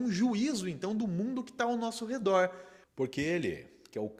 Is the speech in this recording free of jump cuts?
no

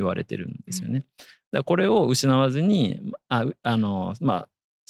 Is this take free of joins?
yes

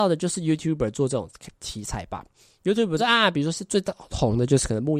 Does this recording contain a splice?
yes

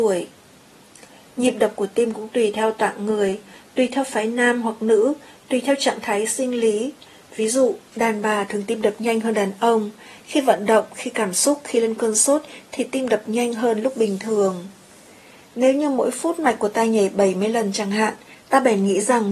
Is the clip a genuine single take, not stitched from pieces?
yes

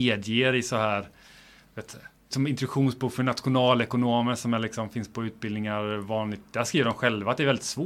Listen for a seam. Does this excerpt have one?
yes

